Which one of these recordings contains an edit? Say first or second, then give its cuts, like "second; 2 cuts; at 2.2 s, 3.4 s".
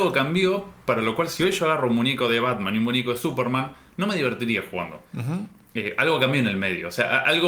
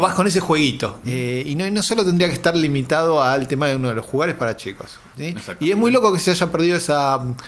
second; 2 cuts; at 1.0 s, 5.1 s